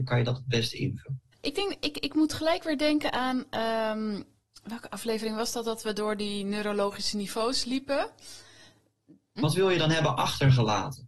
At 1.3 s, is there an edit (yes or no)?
yes